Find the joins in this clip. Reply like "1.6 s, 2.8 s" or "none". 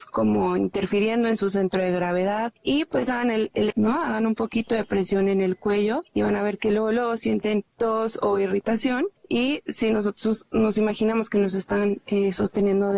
3.7 s